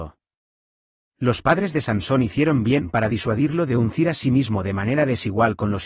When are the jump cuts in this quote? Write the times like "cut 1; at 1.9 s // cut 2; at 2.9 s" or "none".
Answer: cut 1; at 1.1 s